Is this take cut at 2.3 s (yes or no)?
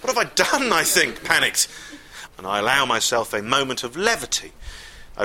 yes